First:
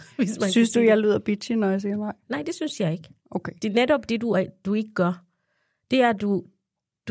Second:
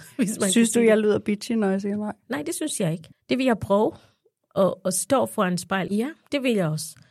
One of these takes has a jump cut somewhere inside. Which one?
second; 2 cuts; at 3.1 s, 5.9 s

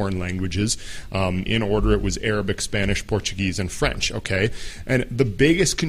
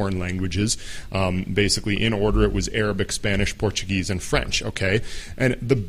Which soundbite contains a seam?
first; 1 cut; at 1.5 s

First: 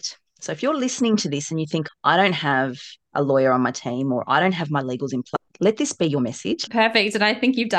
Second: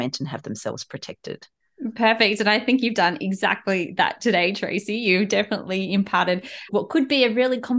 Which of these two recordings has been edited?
first; 2 cuts; at 1.9 s, 6.7 s

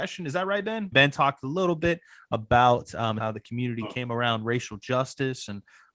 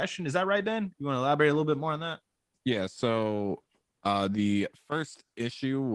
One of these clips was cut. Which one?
first; 2 cuts; at 0.9 s, 3.2 s

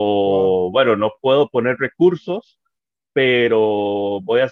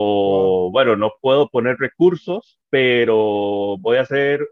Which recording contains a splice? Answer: second; 1 cut; at 2.6 s

